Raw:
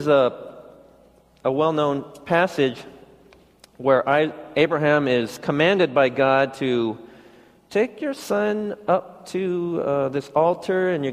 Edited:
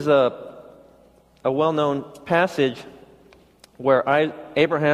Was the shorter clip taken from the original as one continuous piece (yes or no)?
yes